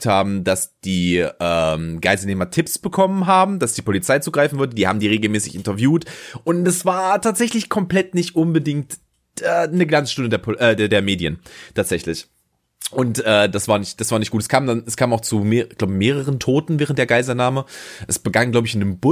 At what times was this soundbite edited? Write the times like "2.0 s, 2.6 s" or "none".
none